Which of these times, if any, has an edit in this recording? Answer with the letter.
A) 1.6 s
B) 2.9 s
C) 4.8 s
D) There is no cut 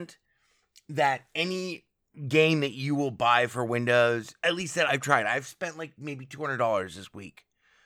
C